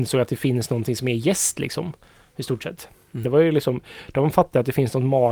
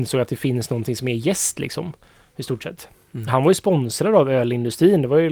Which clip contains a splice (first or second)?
first